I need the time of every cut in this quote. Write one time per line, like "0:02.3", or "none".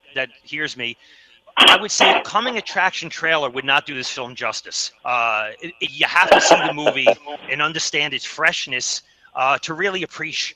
0:05.0